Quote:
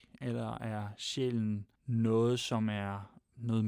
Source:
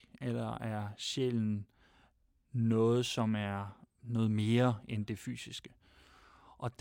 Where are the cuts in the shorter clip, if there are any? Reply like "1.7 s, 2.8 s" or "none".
1.8 s